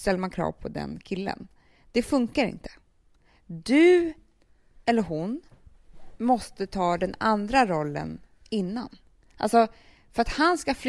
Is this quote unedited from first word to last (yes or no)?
yes